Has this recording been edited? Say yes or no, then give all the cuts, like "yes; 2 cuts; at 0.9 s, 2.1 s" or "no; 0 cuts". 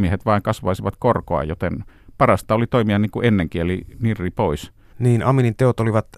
yes; 1 cut; at 4.9 s